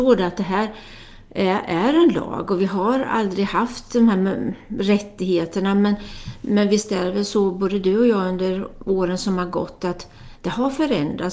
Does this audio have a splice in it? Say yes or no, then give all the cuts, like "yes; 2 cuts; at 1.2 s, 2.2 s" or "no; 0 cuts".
no; 0 cuts